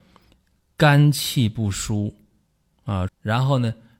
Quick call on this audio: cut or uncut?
cut